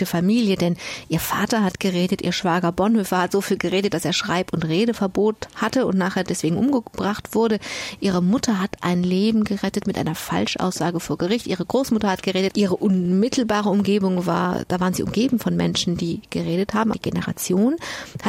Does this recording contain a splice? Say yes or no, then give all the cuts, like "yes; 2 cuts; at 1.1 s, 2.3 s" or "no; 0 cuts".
yes; 2 cuts; at 12.5 s, 16.9 s